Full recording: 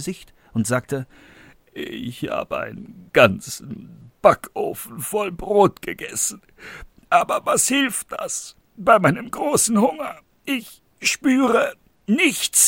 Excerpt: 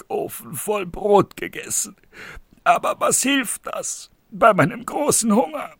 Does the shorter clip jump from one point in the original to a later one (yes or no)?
no